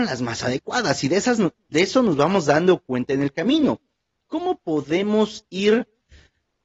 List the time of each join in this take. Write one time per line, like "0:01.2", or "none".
none